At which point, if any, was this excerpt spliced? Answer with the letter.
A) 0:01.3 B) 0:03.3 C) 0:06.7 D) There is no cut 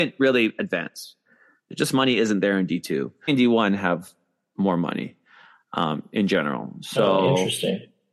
B